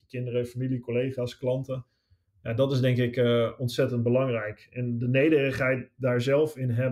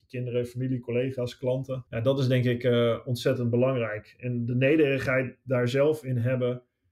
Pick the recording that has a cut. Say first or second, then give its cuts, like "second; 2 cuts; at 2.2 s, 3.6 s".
second; 1 cut; at 1.9 s